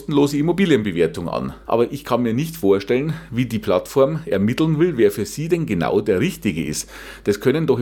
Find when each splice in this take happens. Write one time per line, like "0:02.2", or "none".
0:01.6